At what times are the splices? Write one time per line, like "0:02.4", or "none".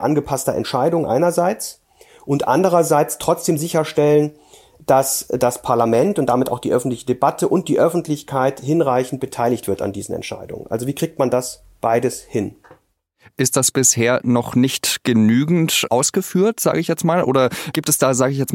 none